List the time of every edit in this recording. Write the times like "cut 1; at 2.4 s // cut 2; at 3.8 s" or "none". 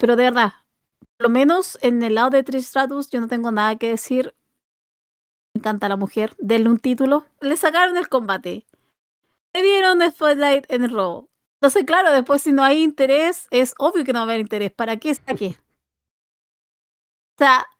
cut 1; at 7.4 s // cut 2; at 11.5 s // cut 3; at 15.2 s